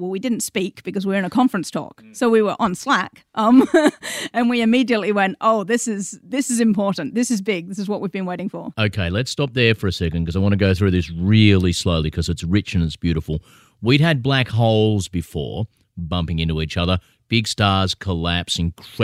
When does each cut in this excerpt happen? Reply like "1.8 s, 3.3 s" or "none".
none